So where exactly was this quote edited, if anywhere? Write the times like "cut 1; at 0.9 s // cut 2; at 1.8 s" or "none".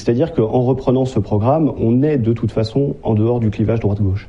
none